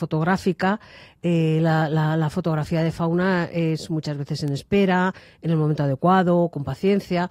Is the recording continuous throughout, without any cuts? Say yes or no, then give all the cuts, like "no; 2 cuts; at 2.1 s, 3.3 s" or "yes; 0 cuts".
yes; 0 cuts